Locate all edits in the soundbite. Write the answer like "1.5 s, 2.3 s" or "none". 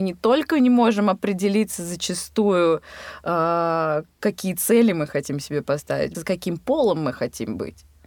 6.1 s